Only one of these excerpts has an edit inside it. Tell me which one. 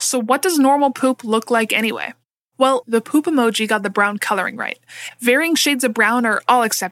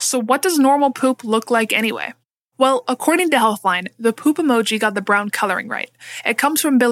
first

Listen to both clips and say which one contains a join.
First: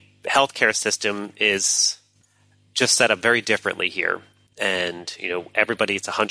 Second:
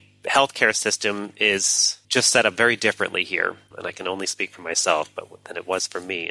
second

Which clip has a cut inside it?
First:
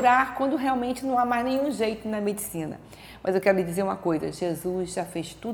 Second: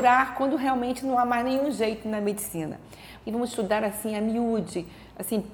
second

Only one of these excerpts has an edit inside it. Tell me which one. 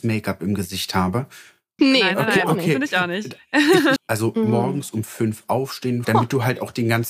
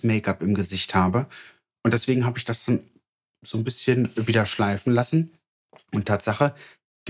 first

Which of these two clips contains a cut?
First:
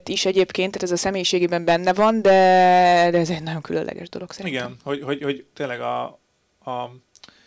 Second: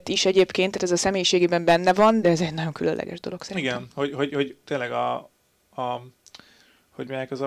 second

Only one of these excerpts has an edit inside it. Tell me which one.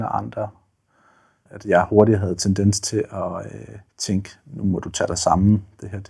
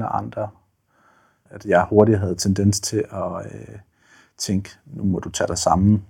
first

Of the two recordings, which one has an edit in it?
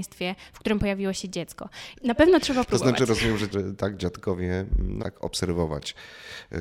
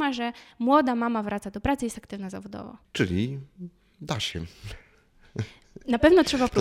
first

